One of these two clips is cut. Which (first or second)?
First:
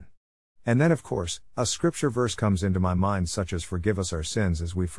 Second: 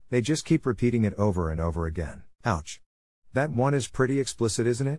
second